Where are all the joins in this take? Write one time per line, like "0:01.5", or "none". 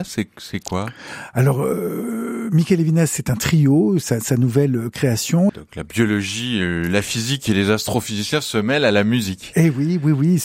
0:05.5